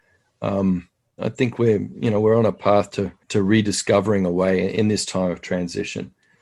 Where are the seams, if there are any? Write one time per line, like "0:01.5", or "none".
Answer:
0:01.2
0:03.2